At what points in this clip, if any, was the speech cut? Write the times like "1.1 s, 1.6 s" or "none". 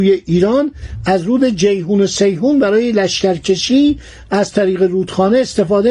none